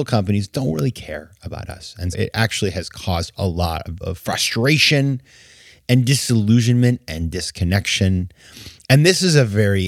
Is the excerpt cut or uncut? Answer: cut